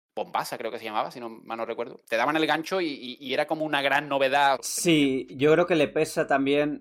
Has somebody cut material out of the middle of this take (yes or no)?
yes